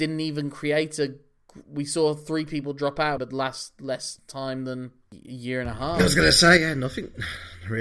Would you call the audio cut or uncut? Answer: cut